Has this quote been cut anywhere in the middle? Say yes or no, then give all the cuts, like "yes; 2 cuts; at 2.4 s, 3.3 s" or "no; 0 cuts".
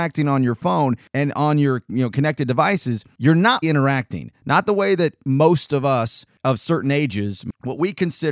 yes; 1 cut; at 3.6 s